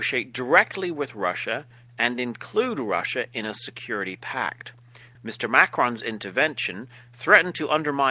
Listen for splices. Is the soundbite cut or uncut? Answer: cut